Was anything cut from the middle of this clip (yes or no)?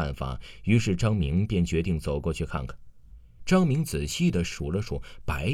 yes